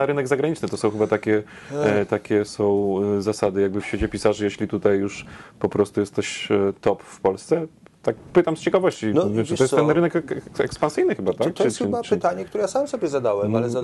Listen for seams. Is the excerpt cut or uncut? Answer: uncut